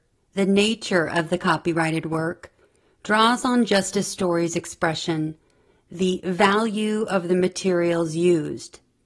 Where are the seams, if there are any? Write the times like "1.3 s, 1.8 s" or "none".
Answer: none